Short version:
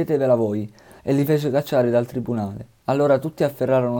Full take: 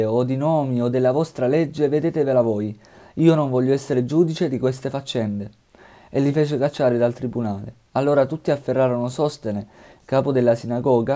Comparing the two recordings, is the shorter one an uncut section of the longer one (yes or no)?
no